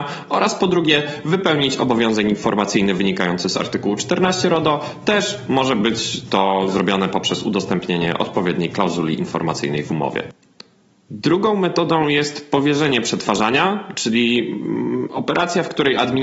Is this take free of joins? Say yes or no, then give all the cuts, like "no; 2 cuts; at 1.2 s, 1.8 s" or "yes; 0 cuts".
yes; 0 cuts